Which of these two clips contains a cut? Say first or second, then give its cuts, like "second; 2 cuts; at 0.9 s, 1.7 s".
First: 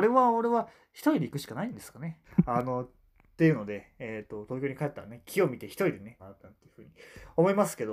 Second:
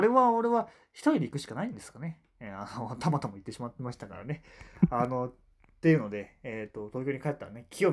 first; 2 cuts; at 2.2 s, 6.2 s